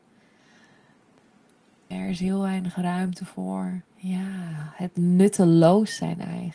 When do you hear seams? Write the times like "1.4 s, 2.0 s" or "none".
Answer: 1.9 s, 3.9 s